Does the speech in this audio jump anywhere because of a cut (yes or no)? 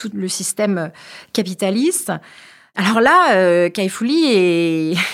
no